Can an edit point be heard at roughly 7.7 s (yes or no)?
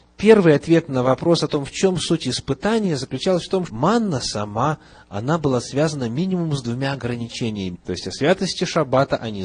yes